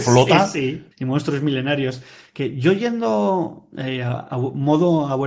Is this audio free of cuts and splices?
no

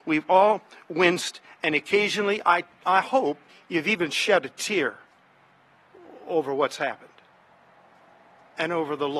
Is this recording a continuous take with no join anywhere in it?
yes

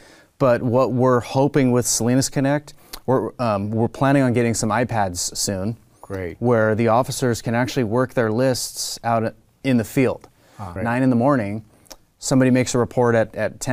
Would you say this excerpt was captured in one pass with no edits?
no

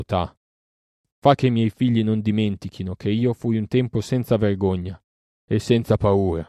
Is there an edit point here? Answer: no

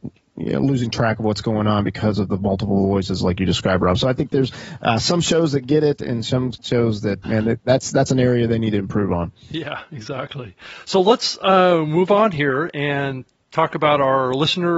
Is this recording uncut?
no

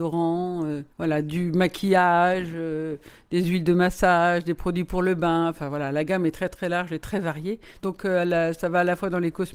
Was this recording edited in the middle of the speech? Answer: yes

